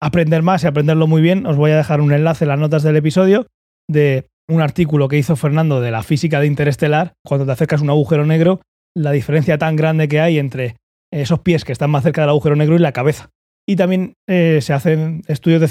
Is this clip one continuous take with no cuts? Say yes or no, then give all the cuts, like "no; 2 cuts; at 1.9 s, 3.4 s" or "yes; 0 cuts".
no; 3 cuts; at 4.3 s, 7.2 s, 13.6 s